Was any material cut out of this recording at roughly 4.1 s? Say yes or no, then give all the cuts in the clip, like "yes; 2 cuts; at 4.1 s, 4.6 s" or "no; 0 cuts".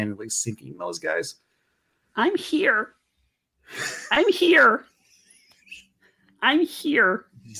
no; 0 cuts